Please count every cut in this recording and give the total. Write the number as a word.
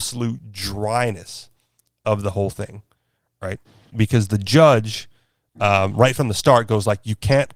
one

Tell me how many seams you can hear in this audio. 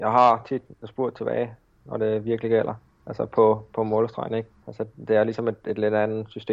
one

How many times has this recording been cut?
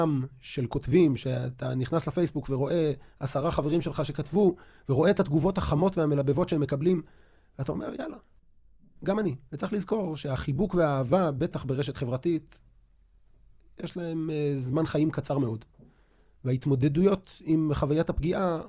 one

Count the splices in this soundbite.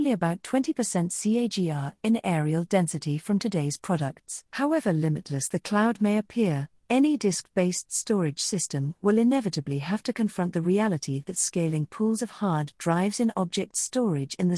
two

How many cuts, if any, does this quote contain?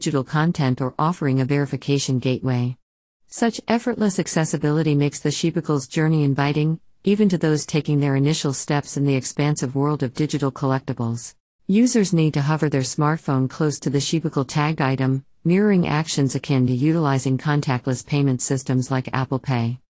one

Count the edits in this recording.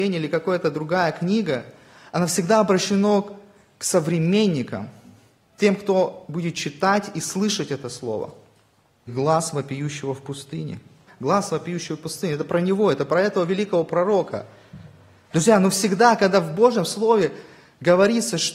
two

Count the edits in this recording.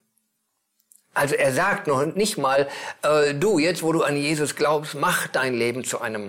zero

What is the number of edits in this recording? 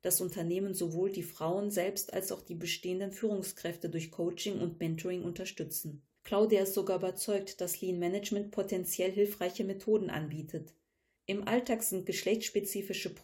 two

